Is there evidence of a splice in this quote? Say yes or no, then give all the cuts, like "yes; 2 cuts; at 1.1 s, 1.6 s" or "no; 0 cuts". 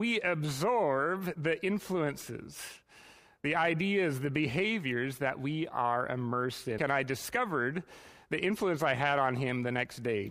yes; 1 cut; at 6.8 s